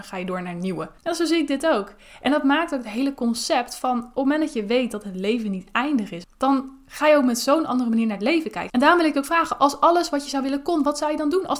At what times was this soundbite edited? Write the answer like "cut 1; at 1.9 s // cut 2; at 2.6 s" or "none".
cut 1; at 1.0 s // cut 2; at 6.2 s // cut 3; at 8.7 s